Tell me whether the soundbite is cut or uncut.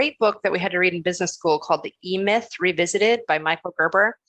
uncut